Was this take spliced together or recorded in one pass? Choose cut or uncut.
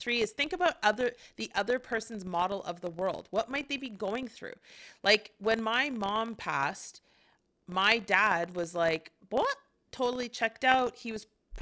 uncut